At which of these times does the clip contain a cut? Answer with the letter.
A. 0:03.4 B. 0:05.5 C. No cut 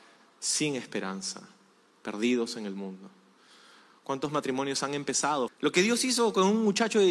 B